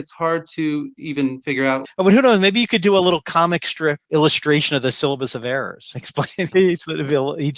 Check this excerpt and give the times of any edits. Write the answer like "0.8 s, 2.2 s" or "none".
1.8 s, 4.0 s, 6.5 s